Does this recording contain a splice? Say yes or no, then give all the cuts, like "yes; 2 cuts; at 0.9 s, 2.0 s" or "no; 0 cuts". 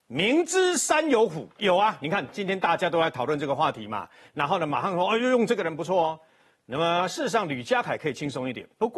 yes; 2 cuts; at 1.6 s, 4.2 s